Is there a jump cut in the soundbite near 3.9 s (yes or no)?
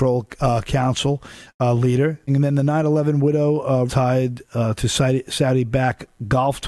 yes